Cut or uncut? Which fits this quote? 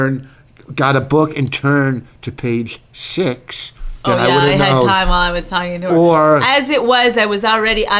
uncut